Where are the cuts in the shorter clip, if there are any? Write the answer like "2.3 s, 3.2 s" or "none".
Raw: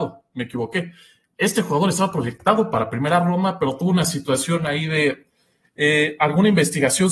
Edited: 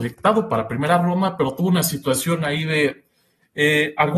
none